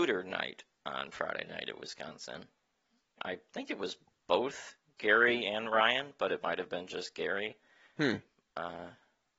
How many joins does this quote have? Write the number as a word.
one